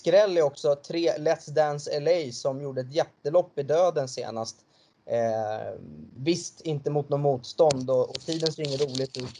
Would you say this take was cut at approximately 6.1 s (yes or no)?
no